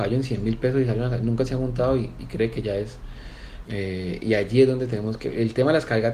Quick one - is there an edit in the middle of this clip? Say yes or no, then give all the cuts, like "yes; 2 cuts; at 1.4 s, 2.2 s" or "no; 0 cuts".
yes; 1 cut; at 3.6 s